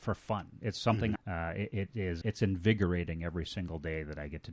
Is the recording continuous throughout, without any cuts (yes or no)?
no